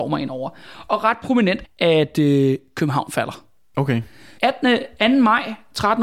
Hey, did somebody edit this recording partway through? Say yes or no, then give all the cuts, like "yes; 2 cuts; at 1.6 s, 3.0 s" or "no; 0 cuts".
yes; 2 cuts; at 1.6 s, 4.4 s